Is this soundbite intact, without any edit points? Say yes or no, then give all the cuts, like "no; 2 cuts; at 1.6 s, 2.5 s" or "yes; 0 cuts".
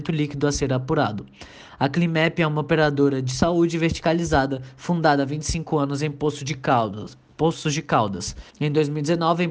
no; 1 cut; at 8.5 s